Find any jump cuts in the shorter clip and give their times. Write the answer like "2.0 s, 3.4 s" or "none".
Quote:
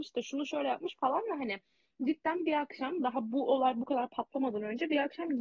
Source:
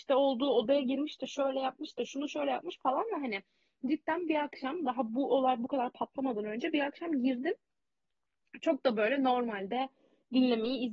none